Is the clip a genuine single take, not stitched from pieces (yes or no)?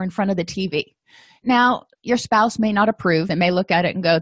yes